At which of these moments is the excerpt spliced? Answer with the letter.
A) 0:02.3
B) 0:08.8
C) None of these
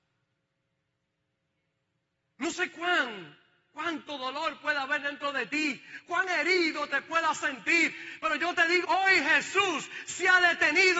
B